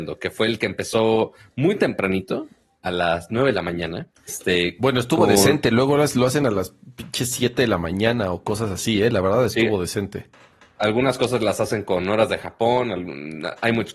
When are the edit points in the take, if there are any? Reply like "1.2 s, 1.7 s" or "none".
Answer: 4.3 s